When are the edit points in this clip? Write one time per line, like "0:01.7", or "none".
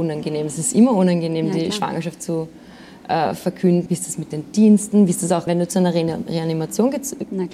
0:03.9
0:05.5